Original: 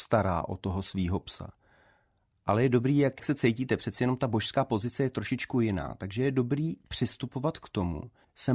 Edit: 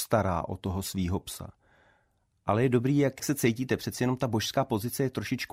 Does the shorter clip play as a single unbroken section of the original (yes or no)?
yes